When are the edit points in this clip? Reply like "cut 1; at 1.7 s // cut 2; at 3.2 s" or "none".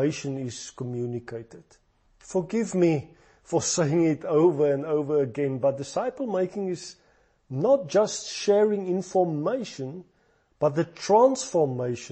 none